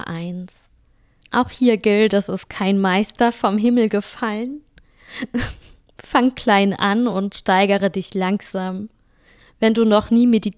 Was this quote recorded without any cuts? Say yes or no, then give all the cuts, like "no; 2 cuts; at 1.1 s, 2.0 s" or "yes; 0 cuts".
no; 1 cut; at 1.2 s